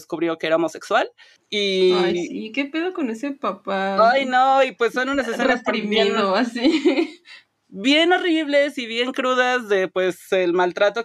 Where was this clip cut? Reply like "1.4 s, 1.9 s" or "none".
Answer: none